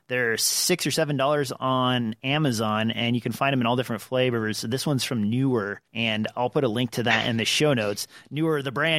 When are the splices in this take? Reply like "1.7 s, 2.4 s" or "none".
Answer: 5.9 s